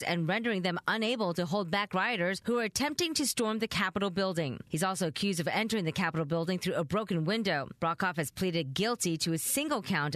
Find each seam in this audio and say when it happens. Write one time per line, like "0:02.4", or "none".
none